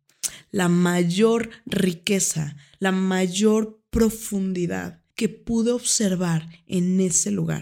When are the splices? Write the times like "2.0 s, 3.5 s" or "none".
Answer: 5.1 s